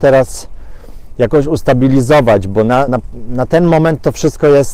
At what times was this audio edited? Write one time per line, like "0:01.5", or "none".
0:02.9